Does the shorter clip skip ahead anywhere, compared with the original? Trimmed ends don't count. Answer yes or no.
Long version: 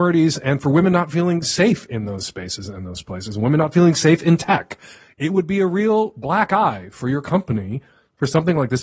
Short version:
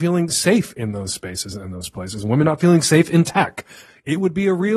no